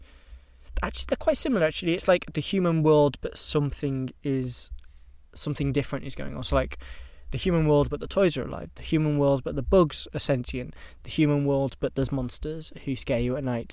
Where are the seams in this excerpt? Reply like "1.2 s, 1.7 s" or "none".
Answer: none